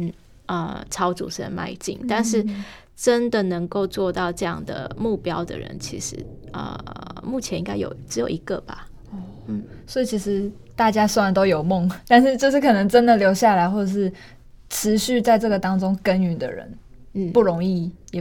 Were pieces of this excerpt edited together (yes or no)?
no